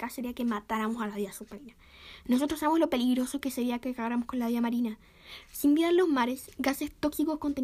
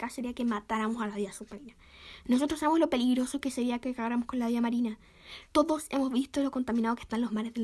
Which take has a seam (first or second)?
second